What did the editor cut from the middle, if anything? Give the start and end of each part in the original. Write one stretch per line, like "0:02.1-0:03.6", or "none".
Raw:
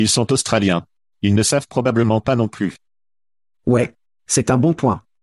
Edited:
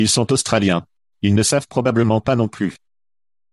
none